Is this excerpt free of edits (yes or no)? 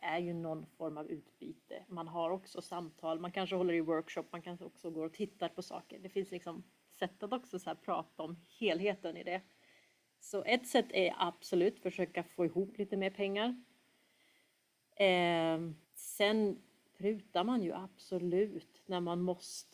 no